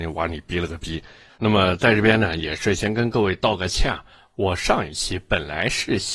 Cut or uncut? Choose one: cut